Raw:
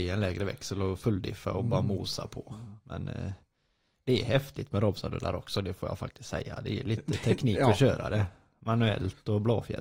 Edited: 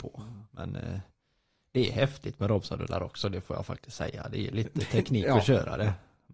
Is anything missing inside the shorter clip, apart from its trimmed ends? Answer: no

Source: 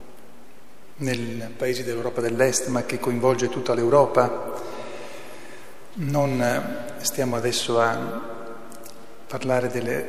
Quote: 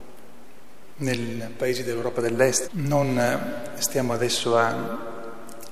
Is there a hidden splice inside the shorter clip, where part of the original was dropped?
yes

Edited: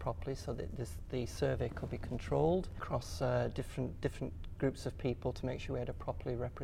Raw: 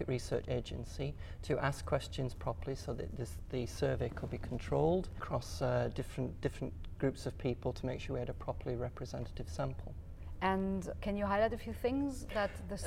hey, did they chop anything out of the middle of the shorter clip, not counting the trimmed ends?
no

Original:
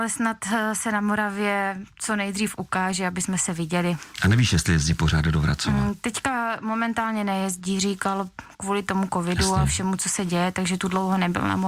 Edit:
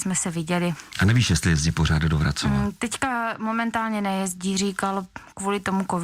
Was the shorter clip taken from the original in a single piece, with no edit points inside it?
yes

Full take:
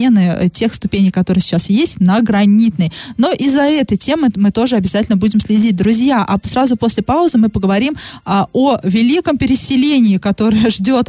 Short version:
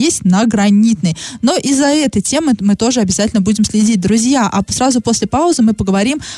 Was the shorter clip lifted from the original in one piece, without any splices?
yes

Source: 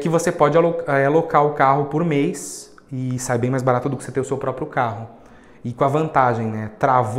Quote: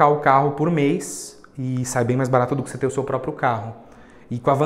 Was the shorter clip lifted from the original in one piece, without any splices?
yes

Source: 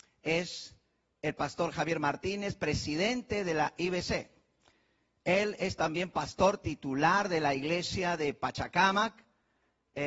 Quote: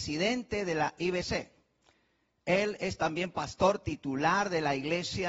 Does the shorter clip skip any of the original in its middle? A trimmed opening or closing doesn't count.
no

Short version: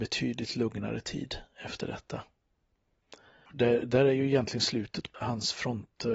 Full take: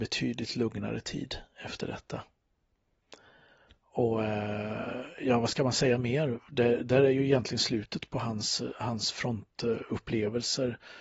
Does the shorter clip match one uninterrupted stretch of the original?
no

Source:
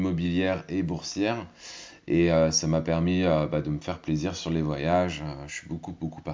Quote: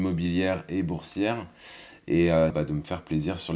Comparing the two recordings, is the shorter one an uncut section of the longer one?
no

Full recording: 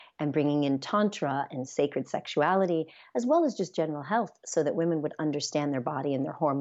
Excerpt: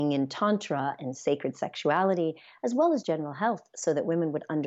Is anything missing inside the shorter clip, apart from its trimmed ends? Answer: yes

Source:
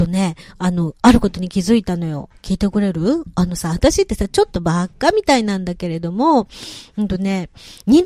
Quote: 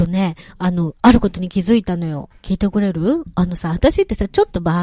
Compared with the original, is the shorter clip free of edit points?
yes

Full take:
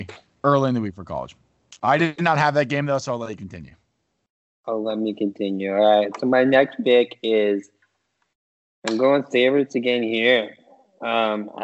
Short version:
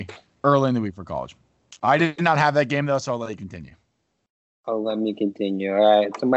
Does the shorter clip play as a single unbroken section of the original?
yes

